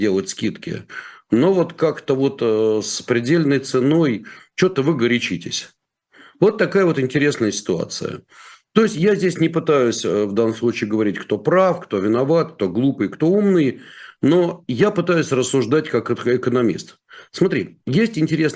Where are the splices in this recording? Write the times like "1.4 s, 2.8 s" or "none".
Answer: none